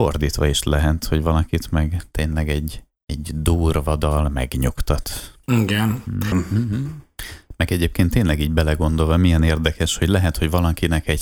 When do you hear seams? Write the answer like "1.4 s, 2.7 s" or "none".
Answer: 6.3 s